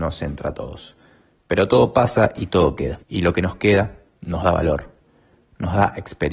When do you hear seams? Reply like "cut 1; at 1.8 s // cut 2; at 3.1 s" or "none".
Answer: cut 1; at 3.0 s

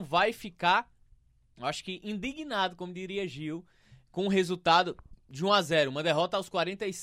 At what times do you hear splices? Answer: none

